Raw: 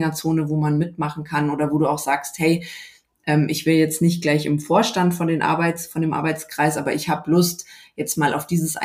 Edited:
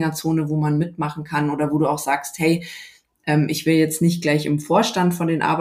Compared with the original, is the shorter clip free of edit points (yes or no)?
yes